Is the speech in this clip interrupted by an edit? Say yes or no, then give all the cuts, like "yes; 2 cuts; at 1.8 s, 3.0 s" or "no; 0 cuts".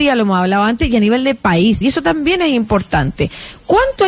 yes; 1 cut; at 1.8 s